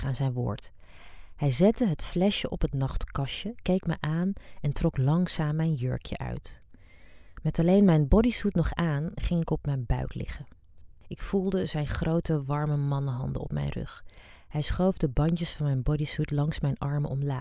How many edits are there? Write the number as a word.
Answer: zero